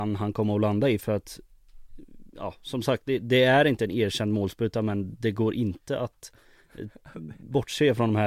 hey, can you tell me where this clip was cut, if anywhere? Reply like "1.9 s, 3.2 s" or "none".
none